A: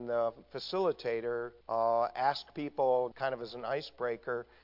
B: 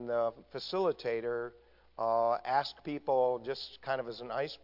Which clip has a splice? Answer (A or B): A